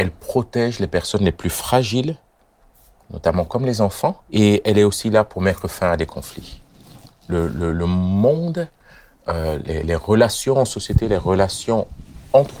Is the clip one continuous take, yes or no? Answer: no